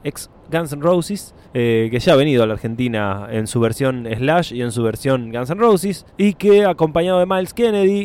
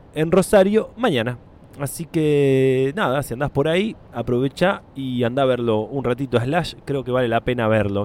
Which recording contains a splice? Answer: first; 2 cuts; at 1.4 s, 6.1 s

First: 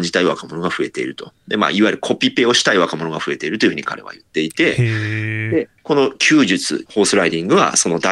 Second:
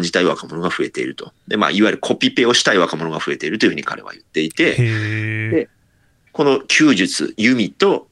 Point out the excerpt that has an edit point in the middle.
first; 2 cuts; at 5.8 s, 6.9 s

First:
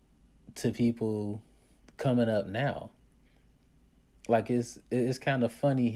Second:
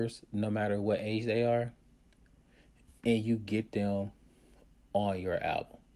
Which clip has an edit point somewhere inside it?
first; 1 cut; at 1.9 s

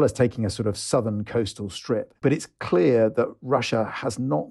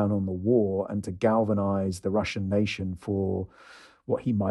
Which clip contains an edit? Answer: first; 1 cut; at 2.2 s

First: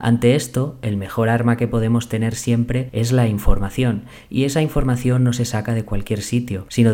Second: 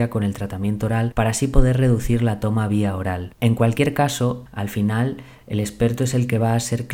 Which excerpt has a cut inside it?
second; 1 cut; at 4.5 s

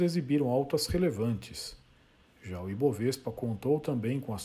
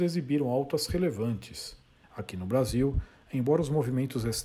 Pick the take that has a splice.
second; 1 cut; at 2.0 s

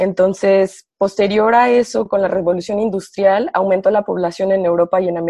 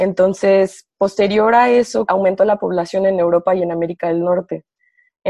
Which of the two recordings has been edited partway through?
second; 1 cut; at 2.1 s

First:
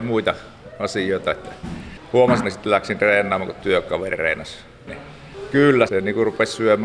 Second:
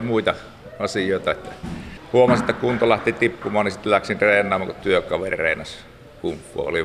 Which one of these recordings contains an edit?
first; 3 cuts; at 2.4 s, 4.9 s, 5.9 s

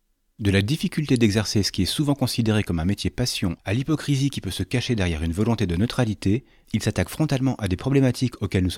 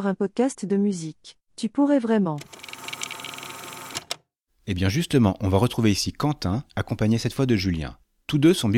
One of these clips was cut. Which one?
second; 2 cuts; at 1.5 s, 4.5 s

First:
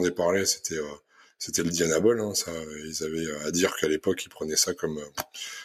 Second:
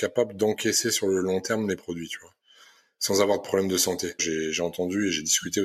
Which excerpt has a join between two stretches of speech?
second; 1 cut; at 4.2 s

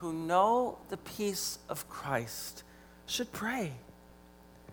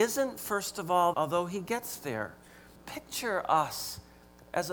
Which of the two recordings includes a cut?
second; 2 cuts; at 1.1 s, 2.8 s

